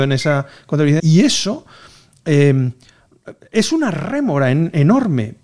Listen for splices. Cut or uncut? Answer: cut